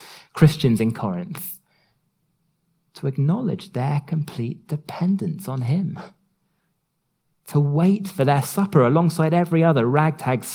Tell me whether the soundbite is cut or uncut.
uncut